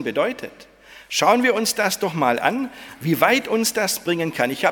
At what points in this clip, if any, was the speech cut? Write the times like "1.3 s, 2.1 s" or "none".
none